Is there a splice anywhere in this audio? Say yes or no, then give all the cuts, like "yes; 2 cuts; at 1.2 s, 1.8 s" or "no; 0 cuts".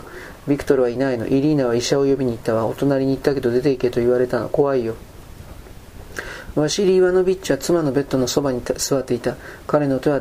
no; 0 cuts